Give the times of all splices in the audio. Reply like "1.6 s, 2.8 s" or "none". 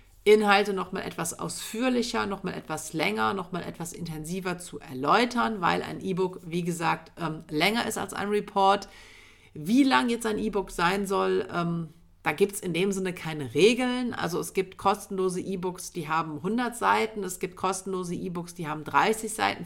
none